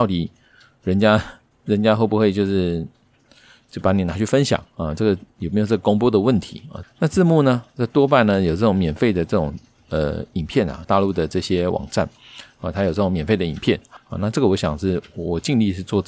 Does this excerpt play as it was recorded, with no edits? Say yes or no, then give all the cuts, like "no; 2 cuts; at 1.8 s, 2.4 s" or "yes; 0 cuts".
no; 3 cuts; at 6.8 s, 10.8 s, 14.0 s